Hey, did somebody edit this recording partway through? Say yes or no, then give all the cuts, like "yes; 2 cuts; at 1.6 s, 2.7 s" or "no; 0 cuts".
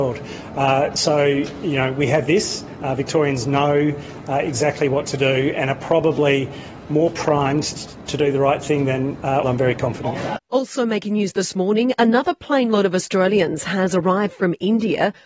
yes; 1 cut; at 9.4 s